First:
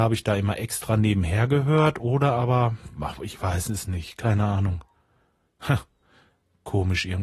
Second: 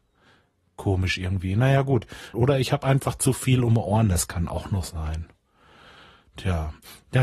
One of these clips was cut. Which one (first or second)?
second